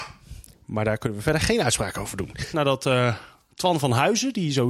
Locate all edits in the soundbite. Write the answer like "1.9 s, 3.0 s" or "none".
2.5 s